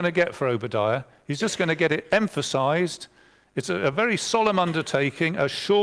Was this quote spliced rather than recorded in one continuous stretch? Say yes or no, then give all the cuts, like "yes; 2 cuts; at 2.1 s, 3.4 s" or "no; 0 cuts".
no; 0 cuts